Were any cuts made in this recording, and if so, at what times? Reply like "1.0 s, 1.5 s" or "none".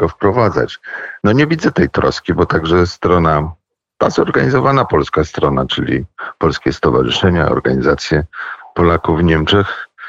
1.2 s